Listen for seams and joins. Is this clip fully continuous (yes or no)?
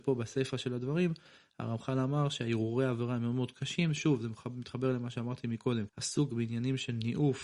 no